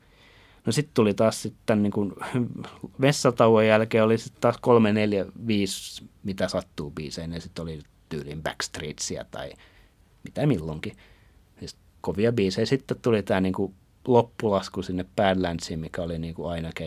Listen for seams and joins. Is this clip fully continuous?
yes; 0 cuts

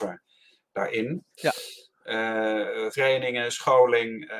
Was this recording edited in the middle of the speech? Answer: yes; 2 cuts; at 1.4 s, 2.9 s

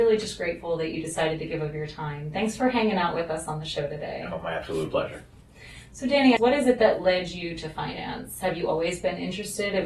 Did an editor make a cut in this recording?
yes; 1 cut; at 6.4 s

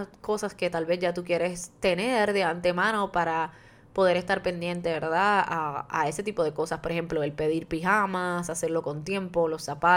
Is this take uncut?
yes; 0 cuts

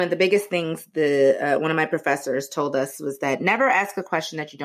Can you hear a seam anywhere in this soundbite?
no; 0 cuts

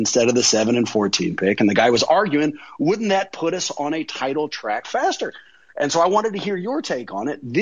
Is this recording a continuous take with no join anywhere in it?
yes; 0 cuts

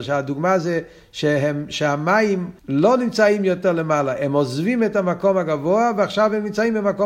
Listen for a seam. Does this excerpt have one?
yes; 1 cut; at 2.6 s

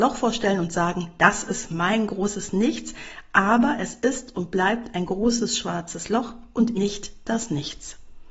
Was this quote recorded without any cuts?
no; 1 cut; at 6.7 s

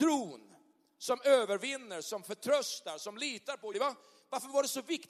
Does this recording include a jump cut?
yes; 1 cut; at 3.7 s

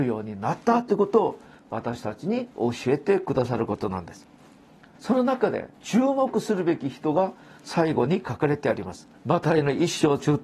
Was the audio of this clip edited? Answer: yes; 2 cuts; at 4.9 s, 9.1 s

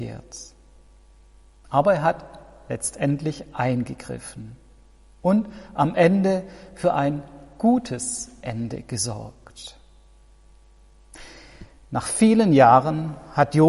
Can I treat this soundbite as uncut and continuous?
yes; 0 cuts

